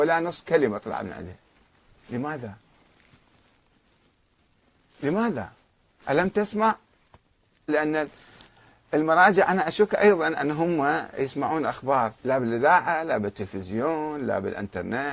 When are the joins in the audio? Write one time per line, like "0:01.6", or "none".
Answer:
0:07.7
0:12.2